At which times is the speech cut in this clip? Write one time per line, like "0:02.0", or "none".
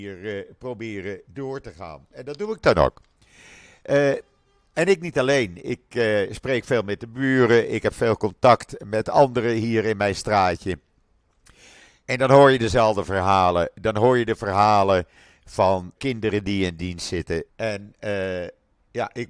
0:15.9
0:17.5